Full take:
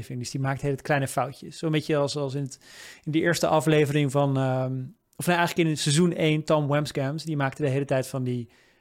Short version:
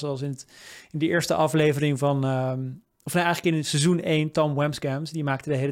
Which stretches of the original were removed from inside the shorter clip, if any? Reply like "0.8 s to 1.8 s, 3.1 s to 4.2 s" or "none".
none

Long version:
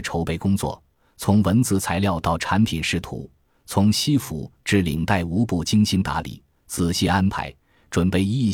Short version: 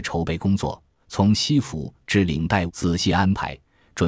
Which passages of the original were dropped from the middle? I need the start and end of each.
1.0 s to 3.6 s, 5.2 s to 6.6 s

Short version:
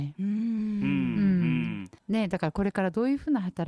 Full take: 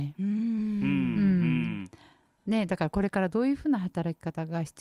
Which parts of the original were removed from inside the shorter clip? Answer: 2.0 s to 2.4 s

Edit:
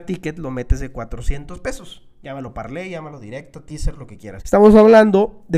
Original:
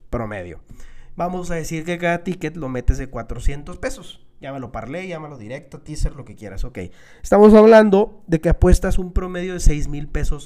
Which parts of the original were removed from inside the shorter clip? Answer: 6.6 s to 7.2 s

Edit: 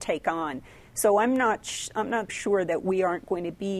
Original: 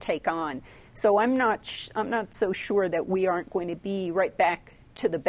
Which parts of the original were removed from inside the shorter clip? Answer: 2.3 s to 2.5 s

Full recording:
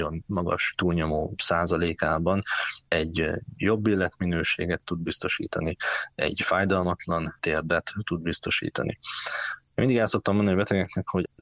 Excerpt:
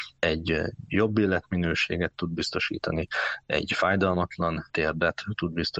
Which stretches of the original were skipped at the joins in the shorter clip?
none

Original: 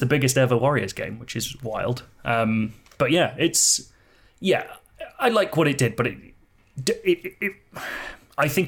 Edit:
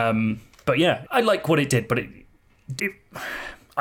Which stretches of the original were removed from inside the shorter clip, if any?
3.4 s to 5.1 s, 6.8 s to 7.4 s

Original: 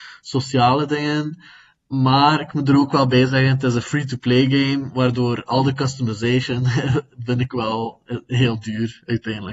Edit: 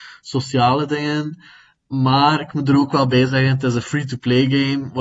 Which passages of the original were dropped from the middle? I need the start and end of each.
none

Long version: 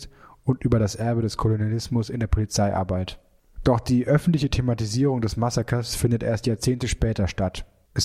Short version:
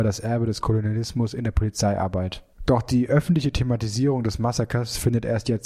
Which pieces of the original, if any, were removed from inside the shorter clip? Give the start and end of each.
3.3 s to 3.5 s

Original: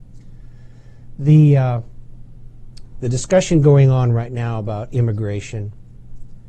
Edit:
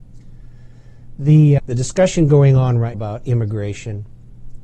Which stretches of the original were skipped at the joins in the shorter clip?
1.6 s to 2.9 s, 4.3 s to 4.6 s

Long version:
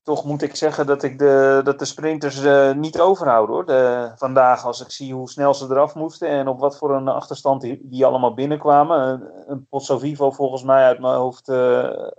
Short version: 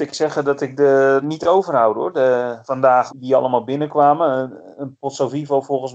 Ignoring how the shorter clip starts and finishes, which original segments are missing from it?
1.6 s to 2.7 s, 4.6 s to 7.8 s

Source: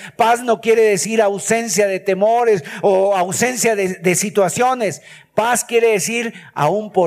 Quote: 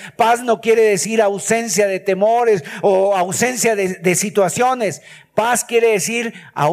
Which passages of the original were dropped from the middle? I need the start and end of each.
none

